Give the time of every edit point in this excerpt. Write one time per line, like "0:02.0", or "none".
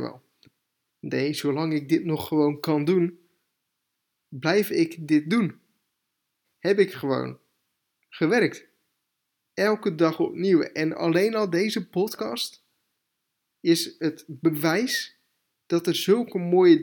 0:06.4
0:09.4